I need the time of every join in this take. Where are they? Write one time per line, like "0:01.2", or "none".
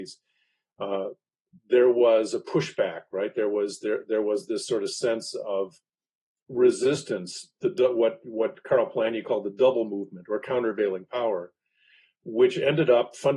none